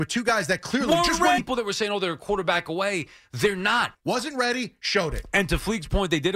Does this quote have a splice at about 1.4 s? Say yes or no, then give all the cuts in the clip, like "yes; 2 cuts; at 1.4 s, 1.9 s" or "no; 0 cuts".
yes; 2 cuts; at 1.4 s, 3.9 s